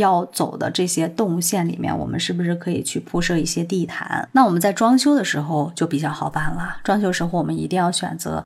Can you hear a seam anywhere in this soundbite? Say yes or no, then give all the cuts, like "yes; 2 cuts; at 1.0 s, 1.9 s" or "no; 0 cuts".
no; 0 cuts